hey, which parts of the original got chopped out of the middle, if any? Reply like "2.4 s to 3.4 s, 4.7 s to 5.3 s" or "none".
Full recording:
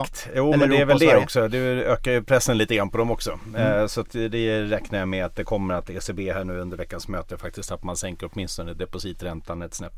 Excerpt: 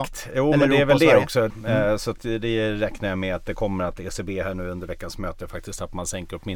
1.5 s to 3.4 s